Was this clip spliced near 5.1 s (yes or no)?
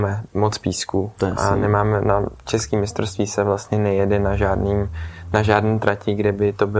no